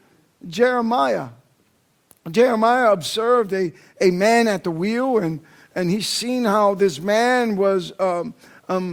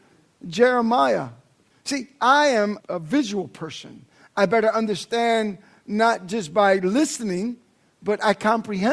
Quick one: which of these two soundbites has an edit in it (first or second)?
second